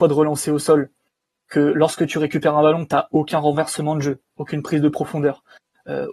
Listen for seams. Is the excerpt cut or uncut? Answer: uncut